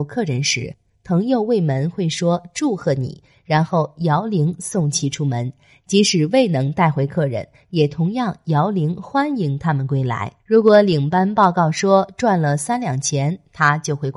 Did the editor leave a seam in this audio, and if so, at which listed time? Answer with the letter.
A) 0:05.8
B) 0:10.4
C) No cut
B